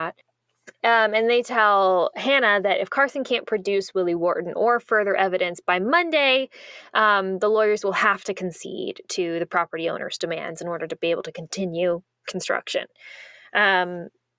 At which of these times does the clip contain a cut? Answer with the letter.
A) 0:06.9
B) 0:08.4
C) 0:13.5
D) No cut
D